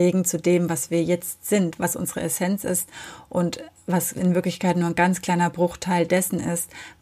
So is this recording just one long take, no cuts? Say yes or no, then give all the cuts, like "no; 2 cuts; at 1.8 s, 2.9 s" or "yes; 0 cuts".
no; 1 cut; at 1.8 s